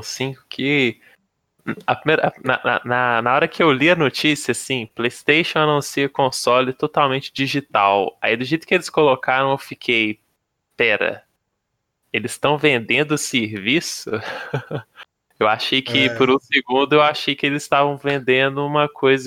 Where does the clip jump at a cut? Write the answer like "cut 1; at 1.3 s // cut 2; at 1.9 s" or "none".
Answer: none